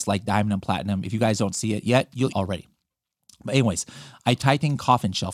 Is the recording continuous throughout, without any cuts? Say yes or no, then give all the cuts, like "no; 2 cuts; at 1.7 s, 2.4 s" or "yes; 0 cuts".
no; 1 cut; at 2.3 s